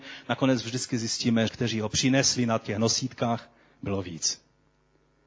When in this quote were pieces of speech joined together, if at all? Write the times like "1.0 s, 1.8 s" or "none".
1.5 s